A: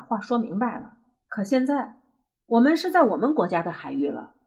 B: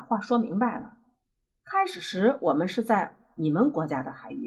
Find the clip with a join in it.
A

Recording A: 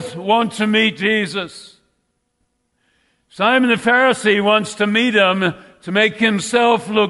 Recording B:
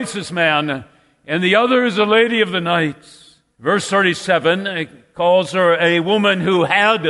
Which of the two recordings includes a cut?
B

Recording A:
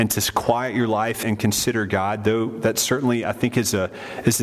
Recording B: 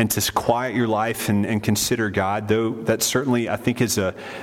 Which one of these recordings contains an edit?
A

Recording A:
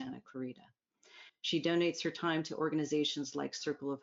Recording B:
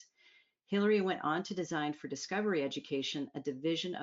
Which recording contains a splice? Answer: A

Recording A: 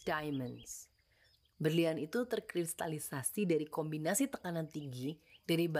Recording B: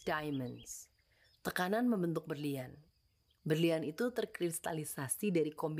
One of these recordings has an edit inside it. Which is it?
A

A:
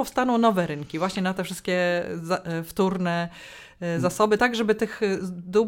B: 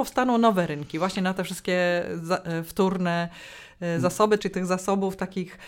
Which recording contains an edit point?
B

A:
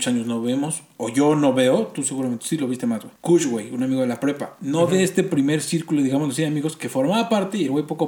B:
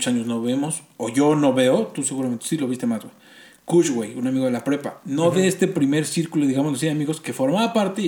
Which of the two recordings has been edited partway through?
A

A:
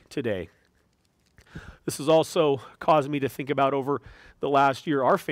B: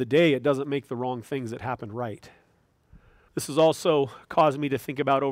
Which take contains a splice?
B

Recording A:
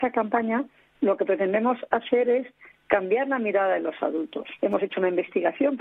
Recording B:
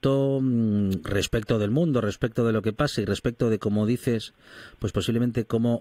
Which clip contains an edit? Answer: A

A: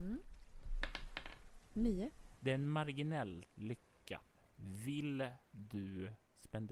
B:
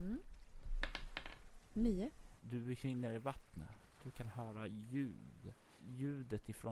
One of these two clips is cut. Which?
B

